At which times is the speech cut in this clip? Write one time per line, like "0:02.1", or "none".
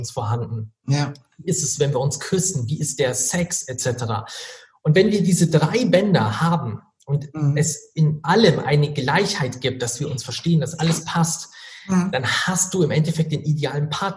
none